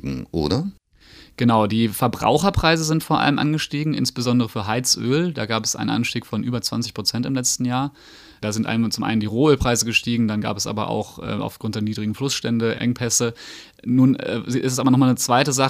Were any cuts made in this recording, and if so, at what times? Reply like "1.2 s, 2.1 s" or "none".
none